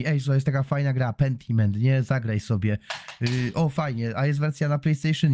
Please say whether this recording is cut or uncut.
uncut